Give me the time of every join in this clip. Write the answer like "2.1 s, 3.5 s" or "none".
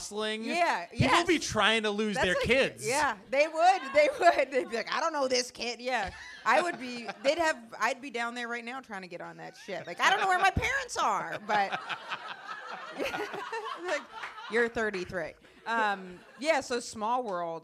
none